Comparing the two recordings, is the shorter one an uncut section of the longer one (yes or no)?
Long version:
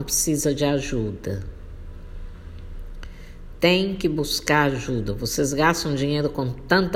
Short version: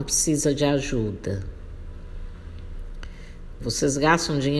no